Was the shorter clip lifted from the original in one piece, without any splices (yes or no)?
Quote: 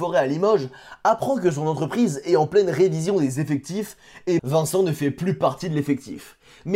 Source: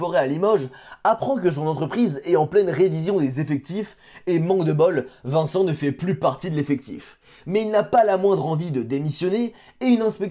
no